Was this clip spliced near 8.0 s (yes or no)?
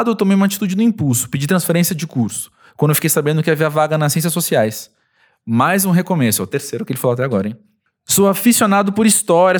no